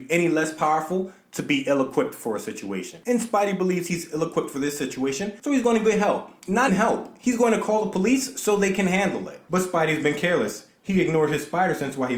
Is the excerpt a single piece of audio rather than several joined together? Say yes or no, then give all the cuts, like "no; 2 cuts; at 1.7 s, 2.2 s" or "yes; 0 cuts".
no; 1 cut; at 6.7 s